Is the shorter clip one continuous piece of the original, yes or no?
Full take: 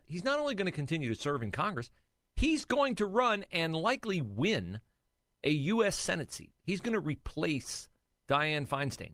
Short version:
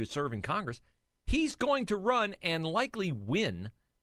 yes